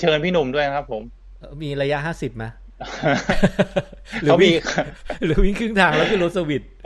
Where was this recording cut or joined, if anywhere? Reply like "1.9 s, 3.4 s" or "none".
none